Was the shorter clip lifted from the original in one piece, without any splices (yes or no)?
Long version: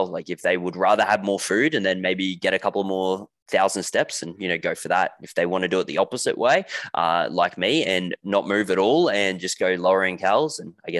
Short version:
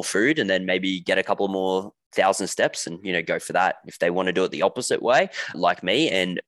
no